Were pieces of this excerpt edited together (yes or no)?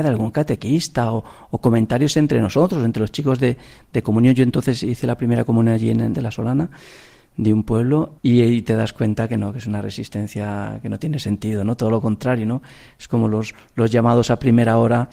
yes